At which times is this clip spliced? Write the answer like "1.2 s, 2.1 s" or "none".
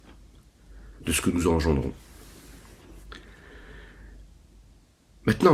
none